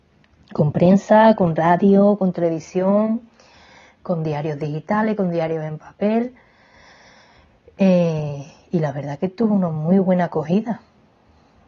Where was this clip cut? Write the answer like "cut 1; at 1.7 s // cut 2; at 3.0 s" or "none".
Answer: none